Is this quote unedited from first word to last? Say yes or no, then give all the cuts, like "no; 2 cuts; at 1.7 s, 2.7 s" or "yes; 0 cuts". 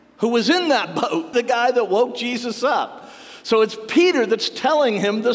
no; 1 cut; at 1.3 s